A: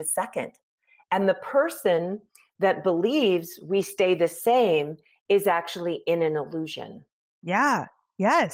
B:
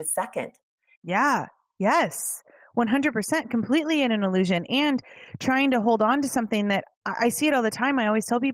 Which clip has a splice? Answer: B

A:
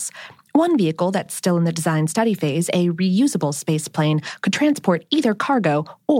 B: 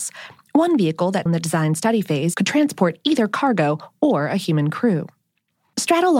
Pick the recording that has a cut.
B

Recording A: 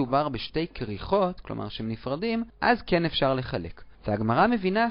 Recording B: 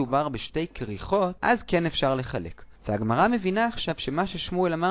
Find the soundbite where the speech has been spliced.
B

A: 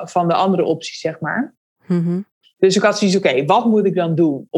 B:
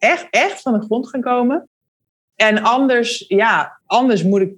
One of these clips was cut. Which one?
A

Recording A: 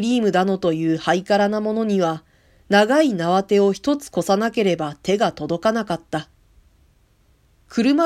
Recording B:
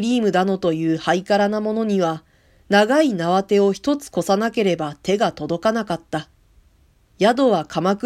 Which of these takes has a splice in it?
B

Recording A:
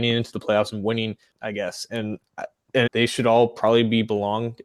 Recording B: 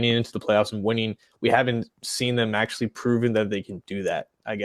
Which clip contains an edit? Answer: A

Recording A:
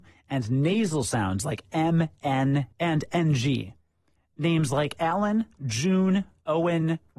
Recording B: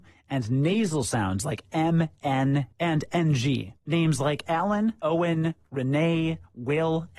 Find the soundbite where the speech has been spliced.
B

